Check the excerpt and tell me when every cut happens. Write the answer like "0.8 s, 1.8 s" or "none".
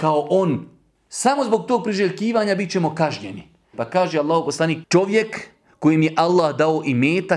0.9 s, 3.7 s, 4.8 s